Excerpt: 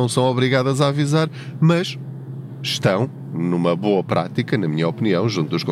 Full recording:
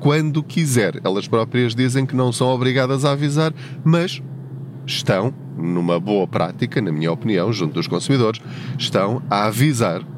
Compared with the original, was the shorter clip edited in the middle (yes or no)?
no